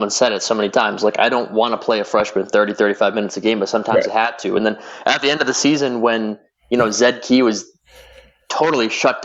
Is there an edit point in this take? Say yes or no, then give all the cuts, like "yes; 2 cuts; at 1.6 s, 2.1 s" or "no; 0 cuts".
no; 0 cuts